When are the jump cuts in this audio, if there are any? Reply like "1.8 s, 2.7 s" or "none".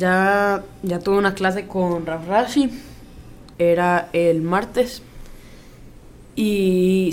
3.5 s

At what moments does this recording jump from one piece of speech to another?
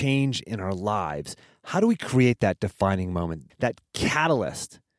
3.5 s

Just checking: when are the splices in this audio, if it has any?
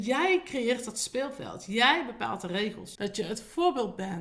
3.0 s

